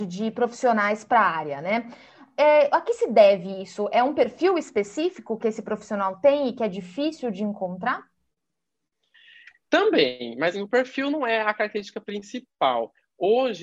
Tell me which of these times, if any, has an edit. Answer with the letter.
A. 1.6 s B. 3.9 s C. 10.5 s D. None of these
C